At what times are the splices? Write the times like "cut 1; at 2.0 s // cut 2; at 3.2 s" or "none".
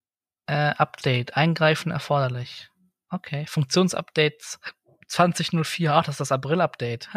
none